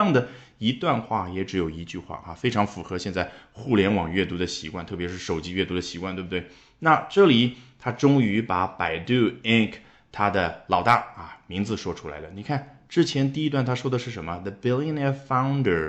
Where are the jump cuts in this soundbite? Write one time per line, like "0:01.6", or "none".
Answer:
none